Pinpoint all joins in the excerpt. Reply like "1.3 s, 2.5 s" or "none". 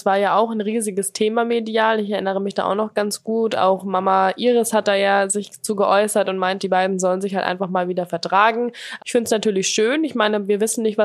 6.6 s, 9.0 s